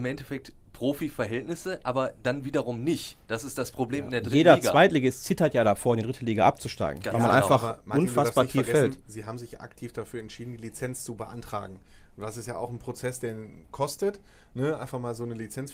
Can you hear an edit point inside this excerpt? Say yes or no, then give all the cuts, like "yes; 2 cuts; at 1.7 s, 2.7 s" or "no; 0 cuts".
no; 0 cuts